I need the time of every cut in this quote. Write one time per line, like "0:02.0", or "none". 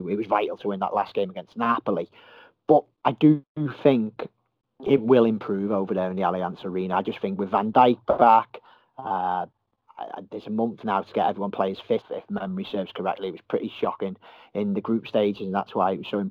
0:02.9
0:12.0